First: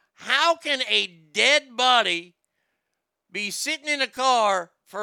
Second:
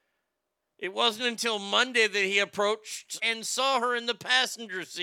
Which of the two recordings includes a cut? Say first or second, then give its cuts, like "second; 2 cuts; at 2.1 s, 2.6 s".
second; 1 cut; at 3.2 s